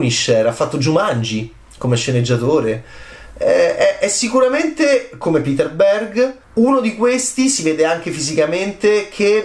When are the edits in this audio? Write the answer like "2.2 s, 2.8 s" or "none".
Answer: 6.4 s